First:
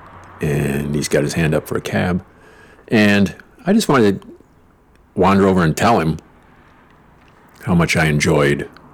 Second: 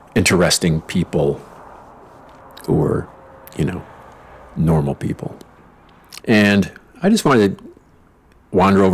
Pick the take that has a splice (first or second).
second